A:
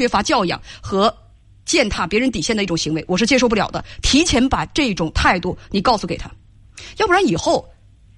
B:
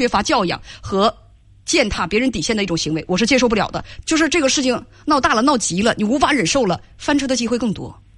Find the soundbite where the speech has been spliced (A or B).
B